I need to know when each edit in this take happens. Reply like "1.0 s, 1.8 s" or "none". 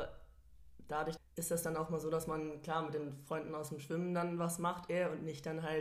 1.2 s